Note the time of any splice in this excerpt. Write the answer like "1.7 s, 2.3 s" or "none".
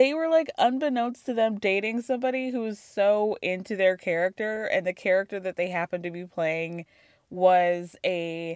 none